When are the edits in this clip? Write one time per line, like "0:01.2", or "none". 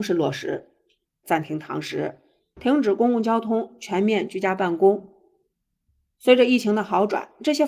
0:01.2